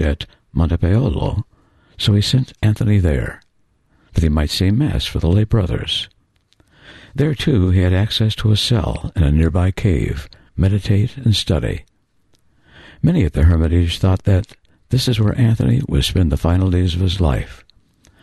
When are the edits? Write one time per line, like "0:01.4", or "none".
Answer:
0:10.5